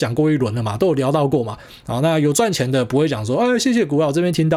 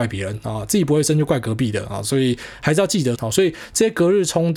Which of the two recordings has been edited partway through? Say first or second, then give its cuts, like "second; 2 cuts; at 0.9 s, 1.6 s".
second; 1 cut; at 3.1 s